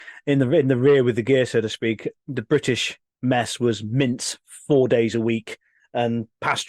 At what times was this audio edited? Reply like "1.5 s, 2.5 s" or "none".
none

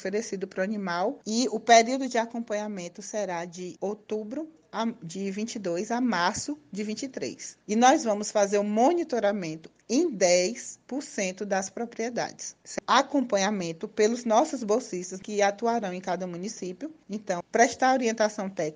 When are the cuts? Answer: 17.4 s

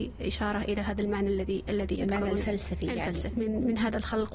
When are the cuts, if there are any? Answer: 3.3 s

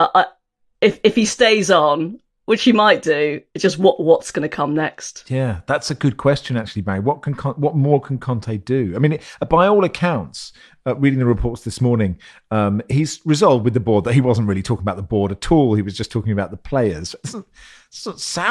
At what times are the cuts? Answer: none

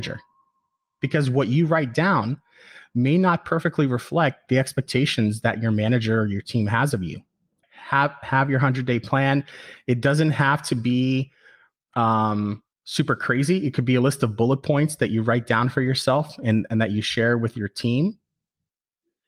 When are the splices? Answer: 7.6 s

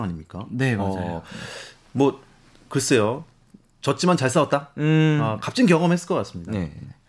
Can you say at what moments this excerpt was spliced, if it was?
none

